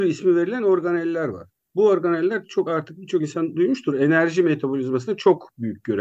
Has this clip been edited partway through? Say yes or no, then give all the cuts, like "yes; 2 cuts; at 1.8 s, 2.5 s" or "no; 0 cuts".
no; 0 cuts